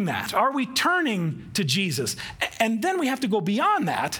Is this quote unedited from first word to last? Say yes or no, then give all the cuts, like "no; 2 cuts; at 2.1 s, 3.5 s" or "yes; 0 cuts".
yes; 0 cuts